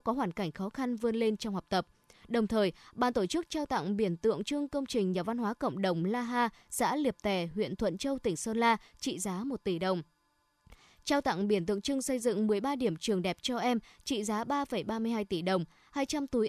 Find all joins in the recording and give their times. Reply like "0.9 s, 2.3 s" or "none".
none

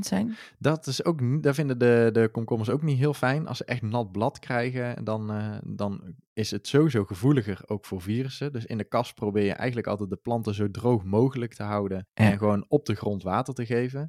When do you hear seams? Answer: 12.1 s

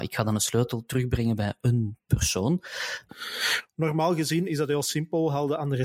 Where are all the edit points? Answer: 3.1 s

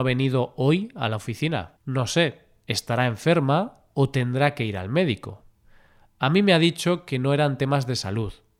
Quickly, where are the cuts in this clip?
1.8 s

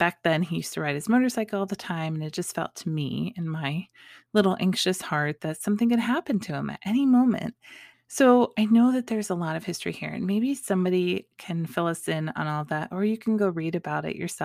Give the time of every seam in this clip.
7.9 s

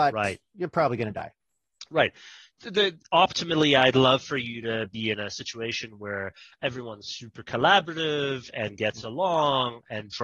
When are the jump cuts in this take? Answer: none

